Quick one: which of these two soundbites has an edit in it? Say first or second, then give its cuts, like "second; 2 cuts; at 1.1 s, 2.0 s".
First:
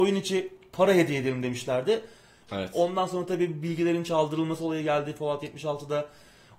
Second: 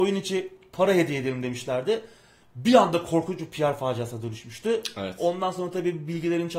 first; 1 cut; at 2.5 s